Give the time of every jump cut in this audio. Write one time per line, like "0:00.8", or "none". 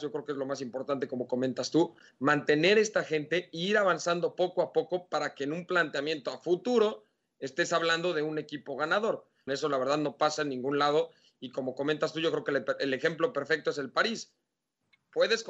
0:09.5